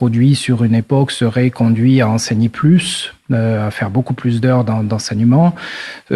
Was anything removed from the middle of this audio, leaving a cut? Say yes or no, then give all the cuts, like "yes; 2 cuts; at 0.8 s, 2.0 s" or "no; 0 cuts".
no; 0 cuts